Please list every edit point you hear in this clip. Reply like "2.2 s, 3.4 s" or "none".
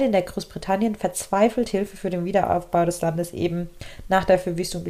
none